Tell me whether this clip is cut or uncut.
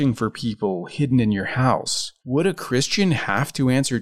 cut